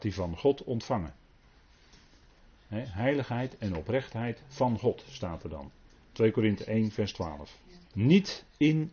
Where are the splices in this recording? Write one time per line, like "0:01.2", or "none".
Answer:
0:07.8